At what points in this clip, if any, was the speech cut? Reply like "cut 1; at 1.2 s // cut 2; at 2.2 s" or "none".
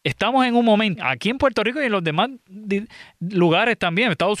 cut 1; at 1.0 s